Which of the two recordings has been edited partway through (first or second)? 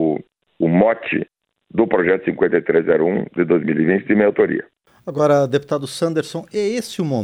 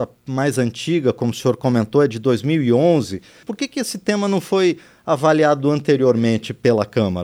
second